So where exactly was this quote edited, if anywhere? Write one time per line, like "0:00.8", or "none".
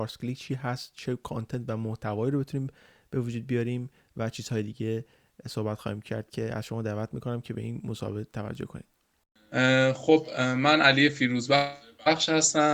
none